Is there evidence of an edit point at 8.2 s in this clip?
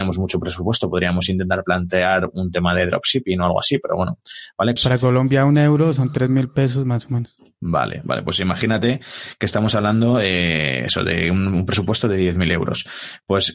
no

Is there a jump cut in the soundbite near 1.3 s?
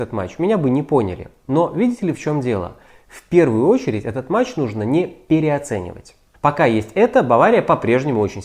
no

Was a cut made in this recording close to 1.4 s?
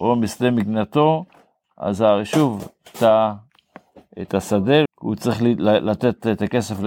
no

